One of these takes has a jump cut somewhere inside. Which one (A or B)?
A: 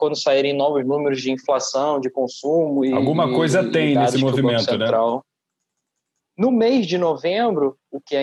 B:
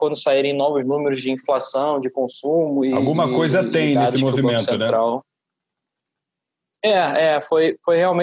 A